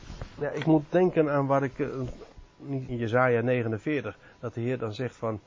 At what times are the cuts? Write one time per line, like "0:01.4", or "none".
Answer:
0:02.9